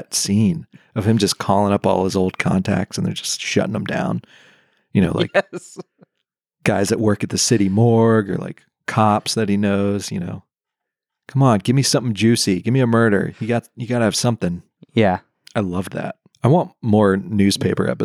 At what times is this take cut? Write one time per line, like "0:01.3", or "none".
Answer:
none